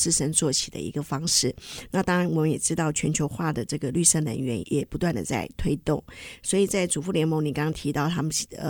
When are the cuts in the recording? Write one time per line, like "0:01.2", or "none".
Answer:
0:04.6